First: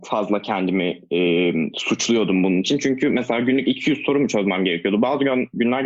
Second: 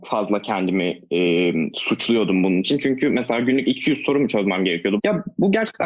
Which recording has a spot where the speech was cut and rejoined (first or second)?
second